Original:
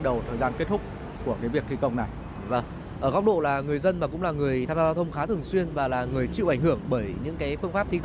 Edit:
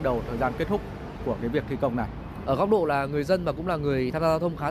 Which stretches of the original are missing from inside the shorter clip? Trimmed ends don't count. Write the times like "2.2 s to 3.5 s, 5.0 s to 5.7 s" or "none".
2.4 s to 3.0 s

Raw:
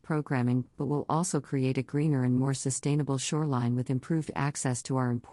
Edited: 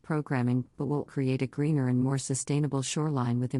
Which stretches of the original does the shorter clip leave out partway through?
1.1 s to 1.4 s

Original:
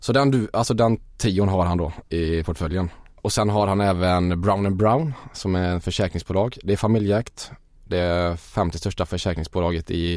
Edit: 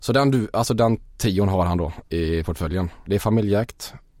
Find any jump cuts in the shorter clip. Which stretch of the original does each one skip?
3.0 s to 6.6 s

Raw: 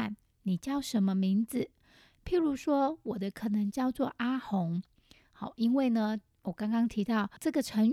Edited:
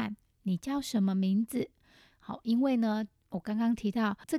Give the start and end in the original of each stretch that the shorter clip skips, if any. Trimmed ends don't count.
2.1 s to 5.2 s

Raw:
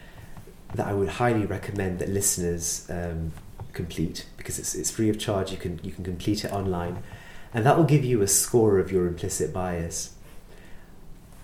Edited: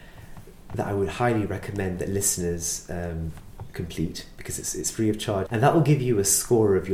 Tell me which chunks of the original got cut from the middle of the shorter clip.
5.5 s to 7.5 s

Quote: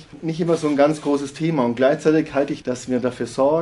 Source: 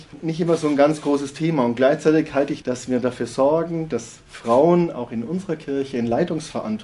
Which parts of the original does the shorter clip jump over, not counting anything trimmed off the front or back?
none

